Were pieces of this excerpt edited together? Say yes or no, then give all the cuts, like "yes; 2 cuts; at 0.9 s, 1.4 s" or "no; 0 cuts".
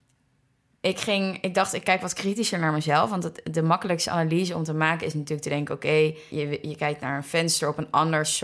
yes; 1 cut; at 6.3 s